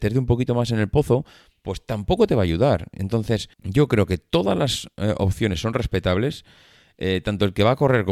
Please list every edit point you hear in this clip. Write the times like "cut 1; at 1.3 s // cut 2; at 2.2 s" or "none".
cut 1; at 3.5 s